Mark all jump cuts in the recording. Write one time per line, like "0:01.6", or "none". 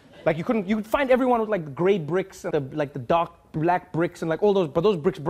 0:02.5